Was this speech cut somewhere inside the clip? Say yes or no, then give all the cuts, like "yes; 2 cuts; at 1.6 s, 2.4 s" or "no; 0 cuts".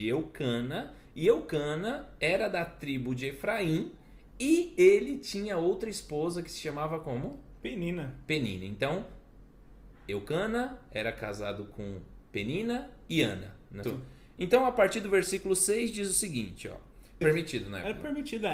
yes; 2 cuts; at 13.8 s, 17.2 s